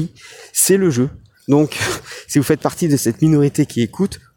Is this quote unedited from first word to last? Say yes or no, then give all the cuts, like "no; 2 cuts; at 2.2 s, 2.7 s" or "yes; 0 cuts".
no; 1 cut; at 1.3 s